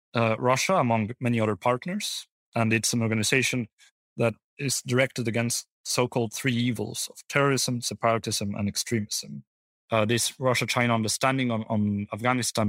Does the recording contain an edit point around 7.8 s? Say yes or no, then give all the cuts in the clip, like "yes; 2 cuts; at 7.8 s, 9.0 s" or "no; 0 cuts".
no; 1 cut; at 9.7 s